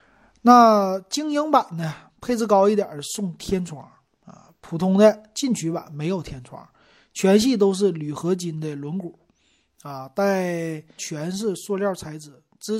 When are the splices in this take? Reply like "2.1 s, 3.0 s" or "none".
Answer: 11.0 s